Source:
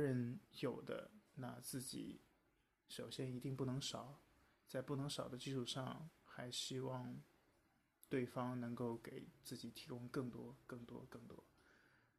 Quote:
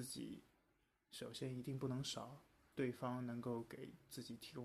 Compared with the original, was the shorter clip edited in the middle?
yes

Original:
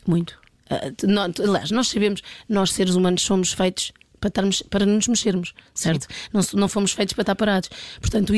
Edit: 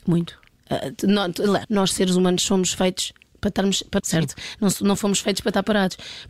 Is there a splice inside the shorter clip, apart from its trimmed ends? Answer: yes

